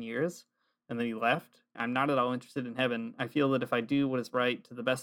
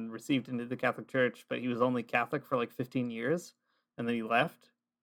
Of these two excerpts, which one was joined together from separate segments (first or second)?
first